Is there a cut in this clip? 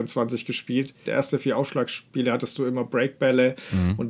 yes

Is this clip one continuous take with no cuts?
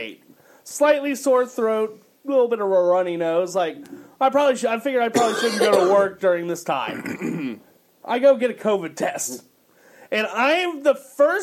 no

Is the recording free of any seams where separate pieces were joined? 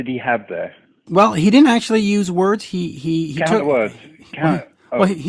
yes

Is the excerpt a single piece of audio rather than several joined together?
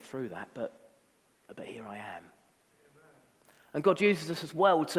yes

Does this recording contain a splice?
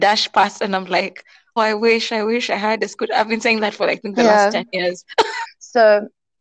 yes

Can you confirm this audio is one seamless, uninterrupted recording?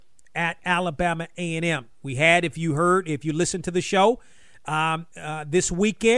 yes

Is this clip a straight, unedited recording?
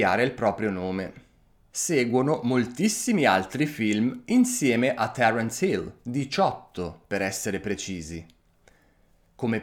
no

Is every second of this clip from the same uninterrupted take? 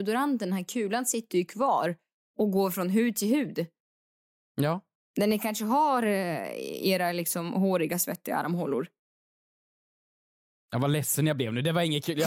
yes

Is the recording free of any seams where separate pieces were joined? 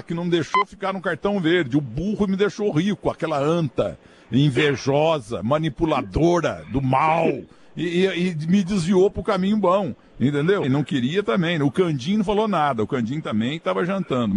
no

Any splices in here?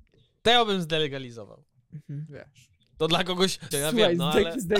yes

